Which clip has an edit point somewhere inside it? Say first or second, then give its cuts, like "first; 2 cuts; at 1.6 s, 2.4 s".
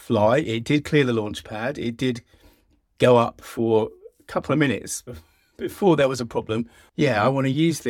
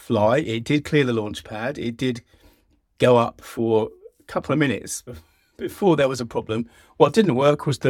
first; 1 cut; at 6.9 s